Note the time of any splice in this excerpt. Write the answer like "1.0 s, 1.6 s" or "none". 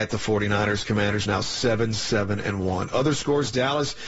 none